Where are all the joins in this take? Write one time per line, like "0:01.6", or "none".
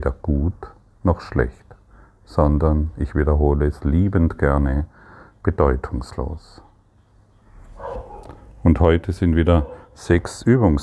none